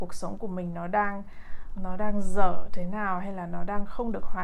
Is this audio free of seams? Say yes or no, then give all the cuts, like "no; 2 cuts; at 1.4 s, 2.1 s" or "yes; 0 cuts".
no; 1 cut; at 1.8 s